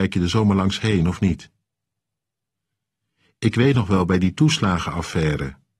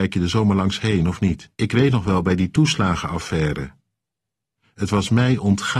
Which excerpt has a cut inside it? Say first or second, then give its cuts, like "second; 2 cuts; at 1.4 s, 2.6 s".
second; 1 cut; at 1.5 s